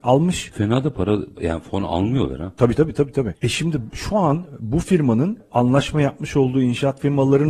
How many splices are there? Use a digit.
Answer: 1